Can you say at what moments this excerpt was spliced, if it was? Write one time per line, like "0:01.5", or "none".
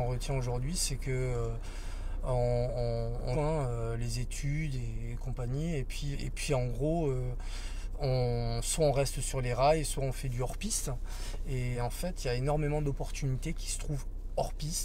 0:03.3
0:06.1
0:11.7